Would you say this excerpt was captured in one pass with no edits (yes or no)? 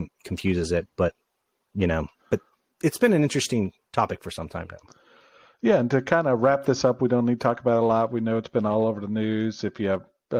no